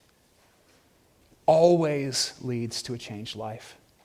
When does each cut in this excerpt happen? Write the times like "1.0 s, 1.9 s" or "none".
none